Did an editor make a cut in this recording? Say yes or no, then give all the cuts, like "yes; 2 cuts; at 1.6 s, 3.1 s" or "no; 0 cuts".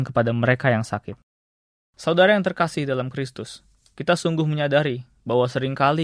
no; 0 cuts